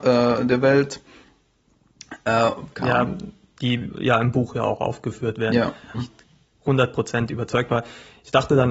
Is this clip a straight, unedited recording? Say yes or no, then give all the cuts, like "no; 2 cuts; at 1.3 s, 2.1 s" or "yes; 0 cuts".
no; 2 cuts; at 2.7 s, 5.9 s